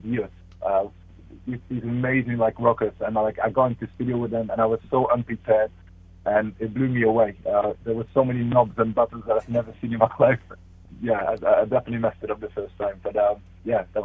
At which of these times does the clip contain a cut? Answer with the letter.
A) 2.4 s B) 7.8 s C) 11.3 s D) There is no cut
B